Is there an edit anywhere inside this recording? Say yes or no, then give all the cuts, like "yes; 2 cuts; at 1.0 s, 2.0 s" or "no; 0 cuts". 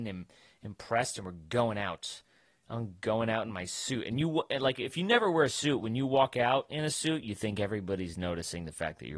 no; 0 cuts